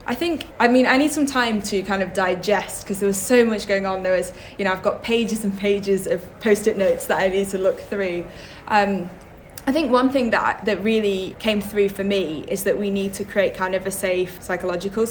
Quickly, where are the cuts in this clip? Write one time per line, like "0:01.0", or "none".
none